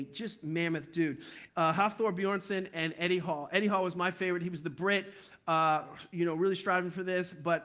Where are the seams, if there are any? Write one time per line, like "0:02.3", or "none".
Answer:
0:01.5